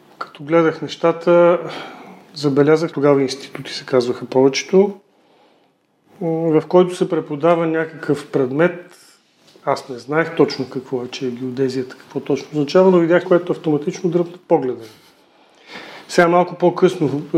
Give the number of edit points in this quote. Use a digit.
2